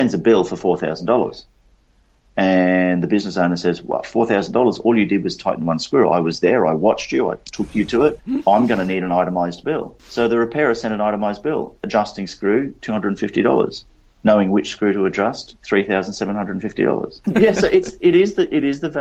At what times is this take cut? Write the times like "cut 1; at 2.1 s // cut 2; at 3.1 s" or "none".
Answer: none